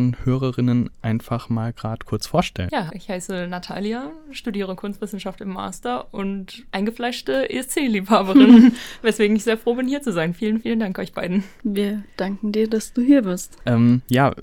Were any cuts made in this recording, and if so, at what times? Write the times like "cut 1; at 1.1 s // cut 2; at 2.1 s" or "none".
cut 1; at 2.9 s

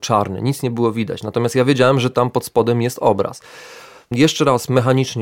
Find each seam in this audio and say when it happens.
none

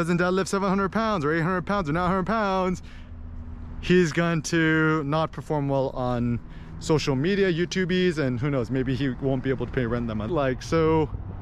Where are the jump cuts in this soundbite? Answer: cut 1; at 10.3 s

